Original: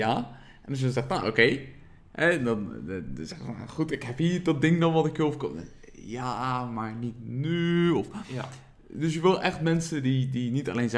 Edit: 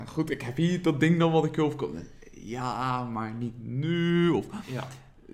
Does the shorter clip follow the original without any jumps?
yes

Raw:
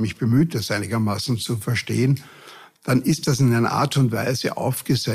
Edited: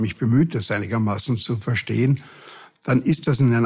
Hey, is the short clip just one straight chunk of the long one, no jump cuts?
yes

